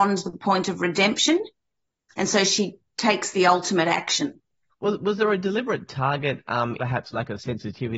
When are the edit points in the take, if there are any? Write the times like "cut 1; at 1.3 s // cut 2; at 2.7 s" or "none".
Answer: cut 1; at 4.7 s // cut 2; at 6.8 s